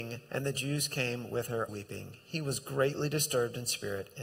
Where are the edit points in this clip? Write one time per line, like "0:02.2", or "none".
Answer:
0:01.7